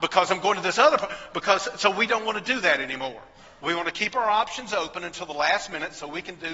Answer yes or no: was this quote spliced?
no